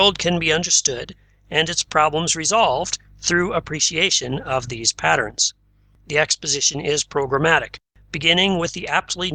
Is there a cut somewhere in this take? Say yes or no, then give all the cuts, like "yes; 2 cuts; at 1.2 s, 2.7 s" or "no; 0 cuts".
no; 0 cuts